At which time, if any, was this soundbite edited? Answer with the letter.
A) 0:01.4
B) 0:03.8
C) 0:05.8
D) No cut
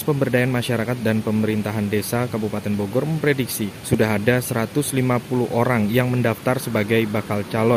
D